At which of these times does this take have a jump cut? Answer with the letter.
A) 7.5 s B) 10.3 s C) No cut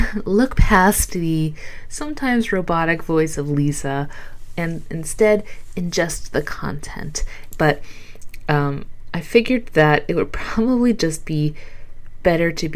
A